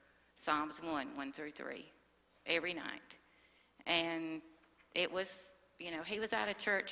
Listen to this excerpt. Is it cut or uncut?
uncut